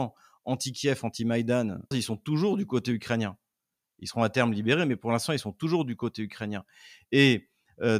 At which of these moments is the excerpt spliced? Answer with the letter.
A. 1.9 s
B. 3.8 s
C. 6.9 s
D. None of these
A